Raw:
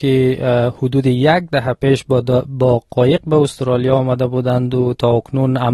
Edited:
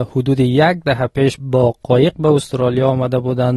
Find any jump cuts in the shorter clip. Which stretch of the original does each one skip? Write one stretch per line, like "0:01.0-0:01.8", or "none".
0:02.0-0:02.4